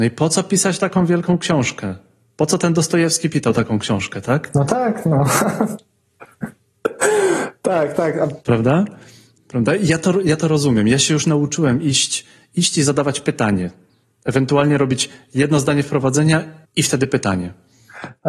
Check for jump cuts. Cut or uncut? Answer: uncut